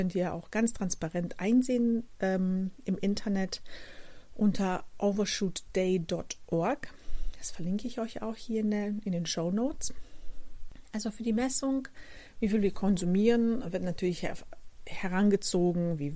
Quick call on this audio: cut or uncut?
uncut